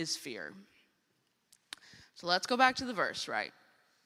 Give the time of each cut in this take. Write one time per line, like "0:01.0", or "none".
none